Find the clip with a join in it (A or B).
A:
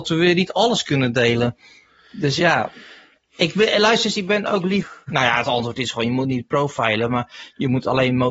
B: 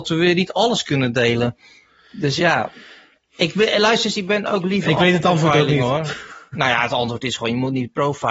A